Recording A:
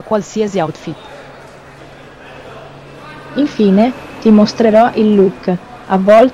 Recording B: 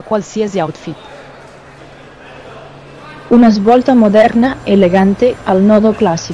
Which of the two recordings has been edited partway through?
B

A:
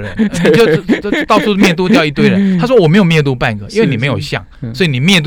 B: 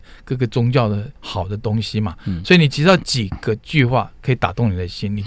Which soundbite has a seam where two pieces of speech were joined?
B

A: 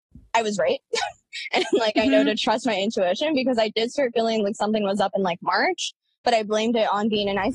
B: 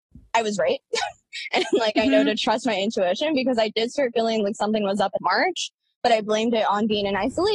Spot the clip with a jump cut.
B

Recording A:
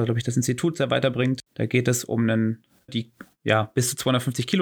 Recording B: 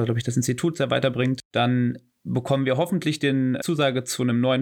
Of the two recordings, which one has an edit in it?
A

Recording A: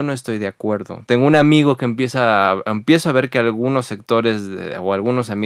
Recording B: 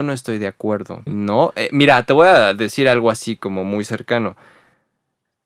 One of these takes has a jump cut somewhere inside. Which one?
B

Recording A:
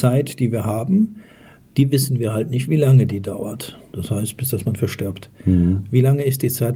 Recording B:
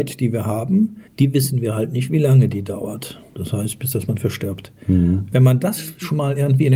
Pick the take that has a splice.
B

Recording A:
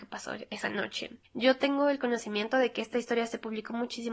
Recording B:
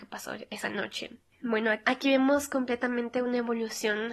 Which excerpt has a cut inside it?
A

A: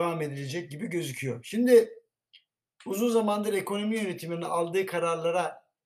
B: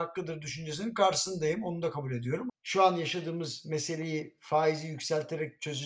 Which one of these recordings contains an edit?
B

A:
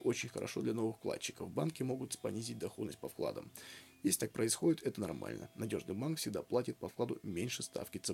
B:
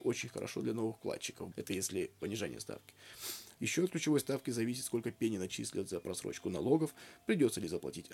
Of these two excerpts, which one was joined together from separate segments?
B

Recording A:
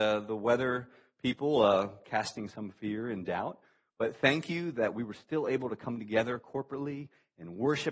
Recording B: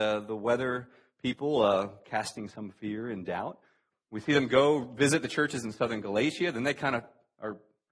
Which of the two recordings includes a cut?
B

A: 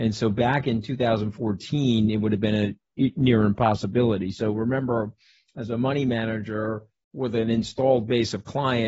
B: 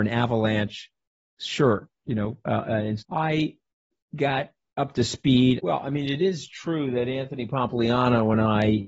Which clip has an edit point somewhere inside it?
B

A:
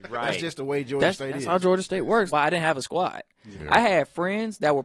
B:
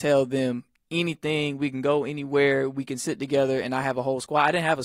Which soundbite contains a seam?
A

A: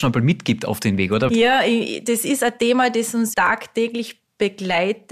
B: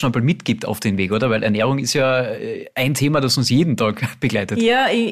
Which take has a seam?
A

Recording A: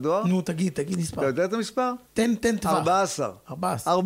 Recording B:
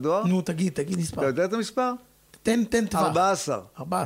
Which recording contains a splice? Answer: A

